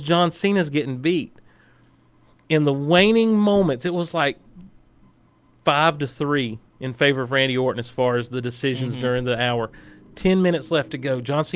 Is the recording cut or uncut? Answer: uncut